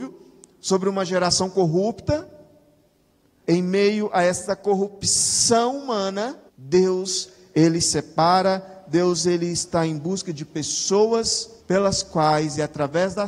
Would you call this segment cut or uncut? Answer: cut